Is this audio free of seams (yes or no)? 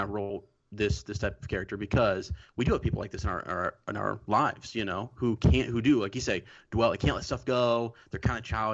yes